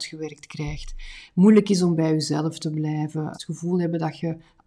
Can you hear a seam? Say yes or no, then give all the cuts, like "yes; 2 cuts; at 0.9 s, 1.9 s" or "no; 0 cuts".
yes; 1 cut; at 3.3 s